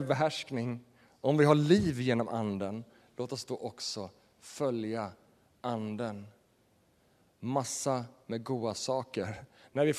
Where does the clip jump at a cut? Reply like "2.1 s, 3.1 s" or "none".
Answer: none

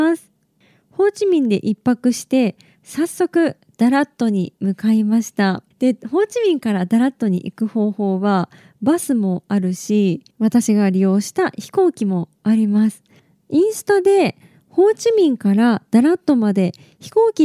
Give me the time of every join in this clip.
5.7 s, 10.3 s

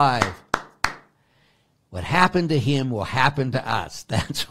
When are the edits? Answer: none

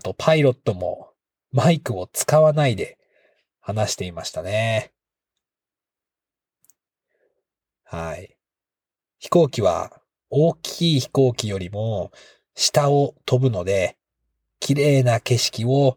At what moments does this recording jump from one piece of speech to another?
none

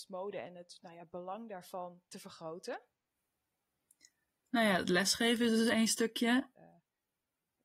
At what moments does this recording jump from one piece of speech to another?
2.1 s, 6.5 s

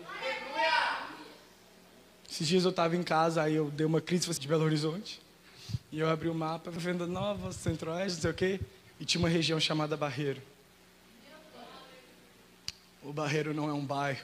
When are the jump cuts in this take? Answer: 4.4 s, 6.8 s

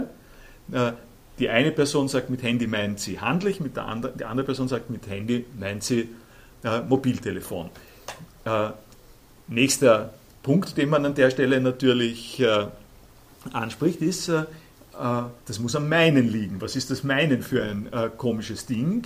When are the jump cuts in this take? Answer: 15.4 s

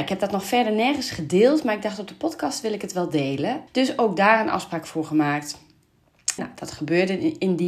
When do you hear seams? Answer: 3.7 s, 6.4 s

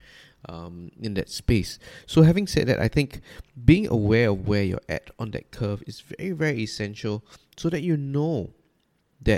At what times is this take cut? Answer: none

